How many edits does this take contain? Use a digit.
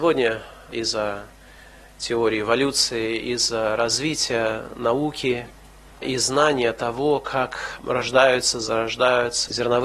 0